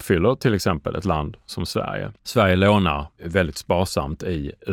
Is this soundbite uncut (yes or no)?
no